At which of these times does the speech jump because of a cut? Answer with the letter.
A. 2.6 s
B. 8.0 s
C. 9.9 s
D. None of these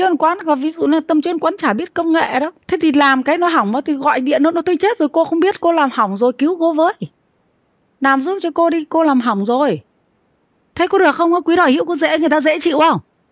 A